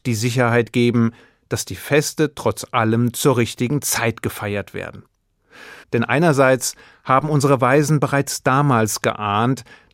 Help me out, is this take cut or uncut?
cut